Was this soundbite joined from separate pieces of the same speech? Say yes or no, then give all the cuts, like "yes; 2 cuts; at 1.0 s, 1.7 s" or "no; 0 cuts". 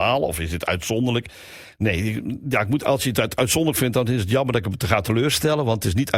no; 0 cuts